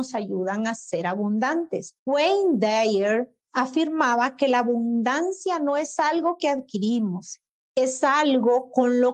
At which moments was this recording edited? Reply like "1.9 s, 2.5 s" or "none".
2.0 s